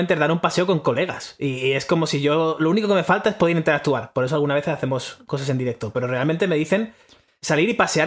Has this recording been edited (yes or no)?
no